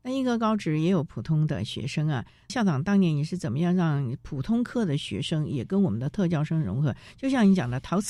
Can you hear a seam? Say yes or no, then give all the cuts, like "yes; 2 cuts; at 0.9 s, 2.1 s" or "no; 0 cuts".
no; 0 cuts